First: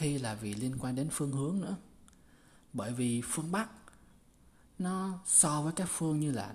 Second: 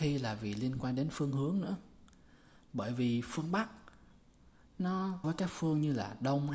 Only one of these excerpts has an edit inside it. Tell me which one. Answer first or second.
second